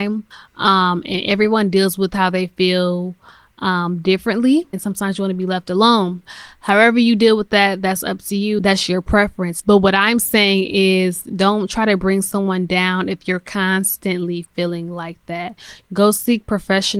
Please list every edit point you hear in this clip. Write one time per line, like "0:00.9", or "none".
0:04.7